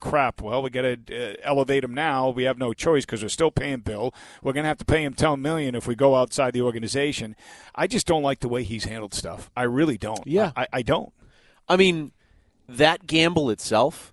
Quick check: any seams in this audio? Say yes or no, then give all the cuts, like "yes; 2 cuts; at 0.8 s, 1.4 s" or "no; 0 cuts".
no; 0 cuts